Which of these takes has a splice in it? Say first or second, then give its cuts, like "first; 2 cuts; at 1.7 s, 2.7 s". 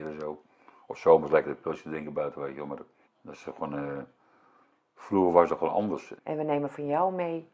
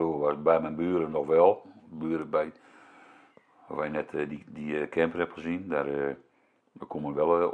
first; 2 cuts; at 3.0 s, 6.2 s